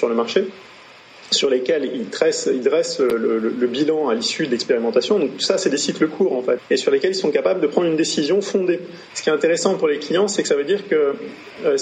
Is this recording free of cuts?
no; 2 cuts; at 6.6 s, 9.1 s

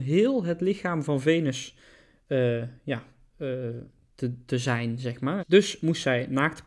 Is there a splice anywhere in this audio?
yes; 1 cut; at 5.4 s

